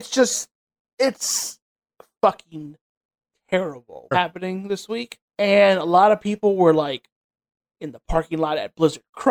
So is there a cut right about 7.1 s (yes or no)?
no